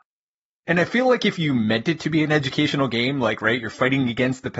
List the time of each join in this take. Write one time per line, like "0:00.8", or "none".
none